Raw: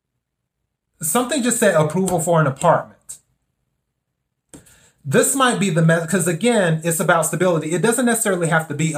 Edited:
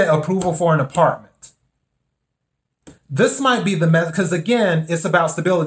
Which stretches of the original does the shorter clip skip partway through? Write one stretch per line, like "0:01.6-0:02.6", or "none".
0:04.6-0:04.9

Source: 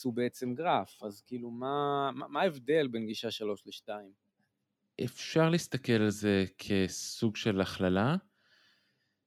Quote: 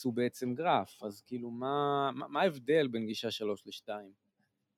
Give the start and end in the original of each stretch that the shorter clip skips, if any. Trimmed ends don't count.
none

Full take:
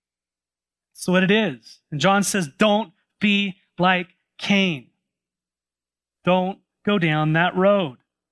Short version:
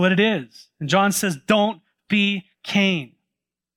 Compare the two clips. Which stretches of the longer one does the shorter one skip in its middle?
0:03.6-0:04.3

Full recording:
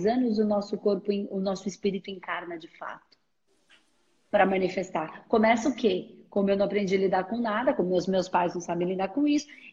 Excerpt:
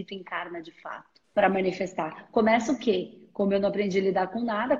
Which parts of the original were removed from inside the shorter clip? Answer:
0:03.2-0:04.2

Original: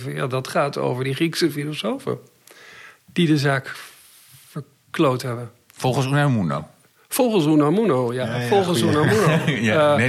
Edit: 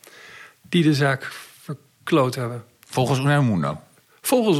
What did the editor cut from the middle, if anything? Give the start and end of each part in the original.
0:04.0-0:04.4

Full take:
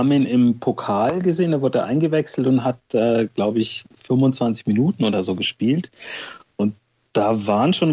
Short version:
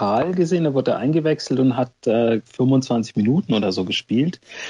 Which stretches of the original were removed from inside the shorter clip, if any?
0:03.3-0:04.0

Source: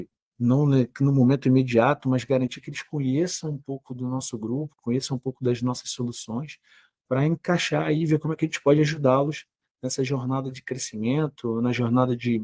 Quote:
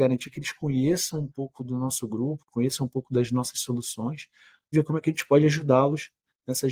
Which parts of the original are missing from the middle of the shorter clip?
0:07.0-0:08.1

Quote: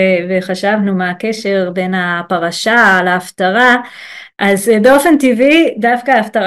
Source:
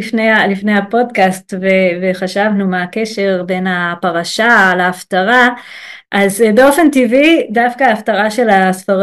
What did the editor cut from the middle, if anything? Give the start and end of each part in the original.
none

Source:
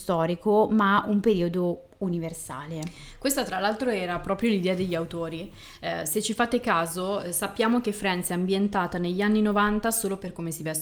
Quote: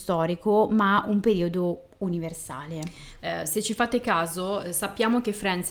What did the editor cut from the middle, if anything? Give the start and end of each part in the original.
0:03.2-0:05.8

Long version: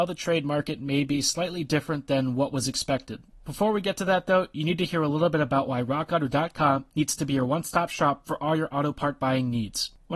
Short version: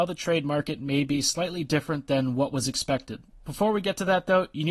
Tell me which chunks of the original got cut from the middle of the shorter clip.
none

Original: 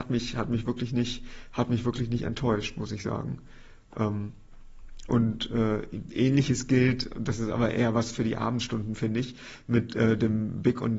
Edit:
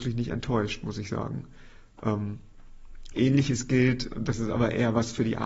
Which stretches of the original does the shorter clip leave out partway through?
0:05.1-0:06.1

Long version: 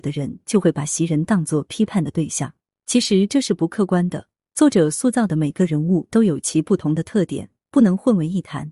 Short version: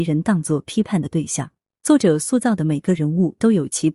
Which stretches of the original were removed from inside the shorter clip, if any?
0:02.8-0:04.5

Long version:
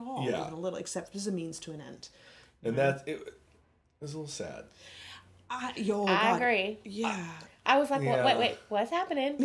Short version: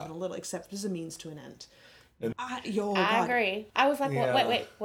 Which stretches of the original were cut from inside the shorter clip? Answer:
0:02.7-0:05.4
0:06.8-0:07.6

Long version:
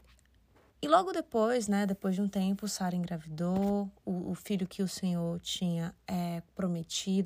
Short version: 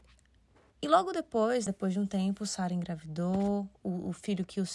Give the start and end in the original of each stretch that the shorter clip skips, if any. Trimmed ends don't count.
0:01.7-0:01.9

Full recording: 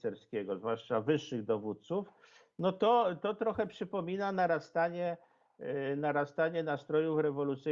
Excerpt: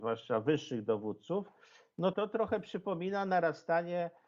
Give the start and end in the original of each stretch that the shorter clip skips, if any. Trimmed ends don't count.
0:02.7-0:03.2

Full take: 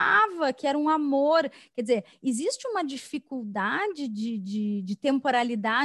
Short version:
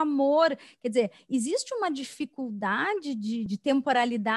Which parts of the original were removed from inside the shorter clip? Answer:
0:04.4-0:04.8

